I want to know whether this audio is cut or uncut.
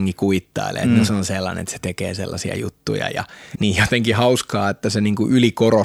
cut